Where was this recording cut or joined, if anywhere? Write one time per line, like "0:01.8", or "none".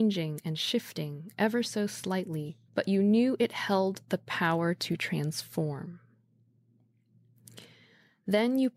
0:02.7